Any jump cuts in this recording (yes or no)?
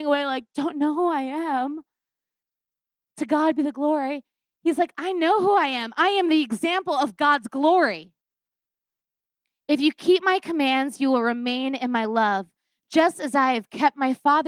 no